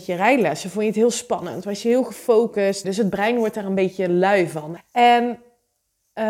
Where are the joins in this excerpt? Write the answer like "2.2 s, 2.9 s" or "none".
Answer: 2.8 s, 4.8 s